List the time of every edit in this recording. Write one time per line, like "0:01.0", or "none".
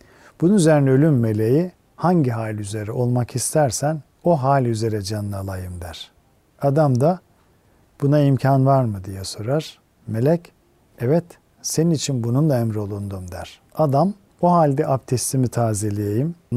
0:04.1